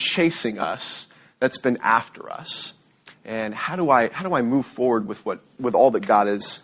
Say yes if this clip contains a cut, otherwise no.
yes